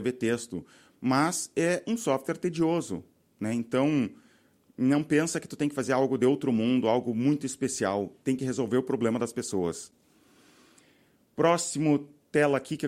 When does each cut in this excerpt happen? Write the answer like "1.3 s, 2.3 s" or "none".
none